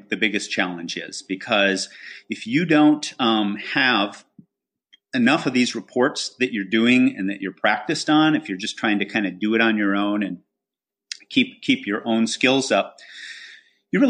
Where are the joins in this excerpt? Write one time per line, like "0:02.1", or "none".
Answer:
none